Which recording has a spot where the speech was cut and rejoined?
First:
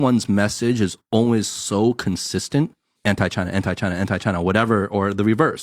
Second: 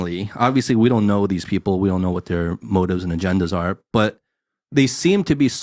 first; 1 cut; at 3.0 s

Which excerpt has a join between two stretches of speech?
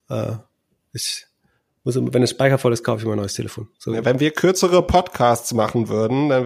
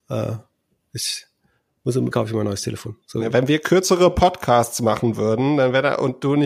second; 1 cut; at 2.1 s

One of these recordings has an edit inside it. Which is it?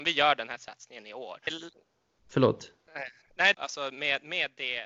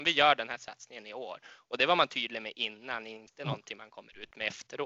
first; 2 cuts; at 1.5 s, 3.5 s

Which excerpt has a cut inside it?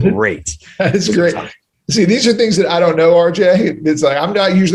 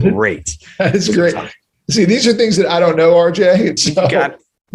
second; 1 cut; at 3.8 s

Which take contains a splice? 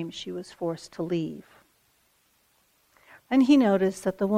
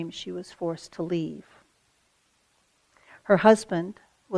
first; 1 cut; at 3.2 s

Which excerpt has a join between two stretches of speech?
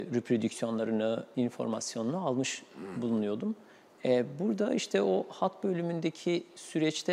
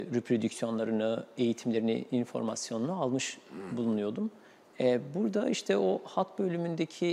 first; 1 cut; at 1.3 s

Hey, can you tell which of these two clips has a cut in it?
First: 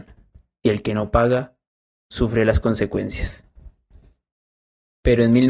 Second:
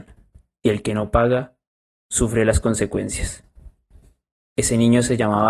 second; 1 cut; at 4.5 s

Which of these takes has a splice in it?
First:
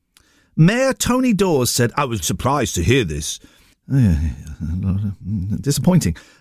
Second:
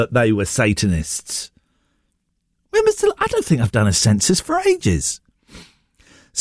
first; 2 cuts; at 2.2 s, 3.7 s

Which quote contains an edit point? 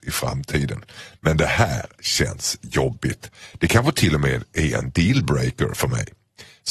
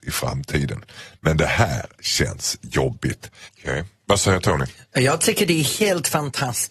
second; 1 cut; at 3.5 s

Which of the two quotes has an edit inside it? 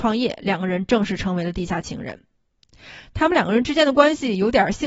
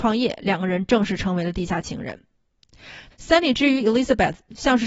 second; 1 cut; at 3.1 s

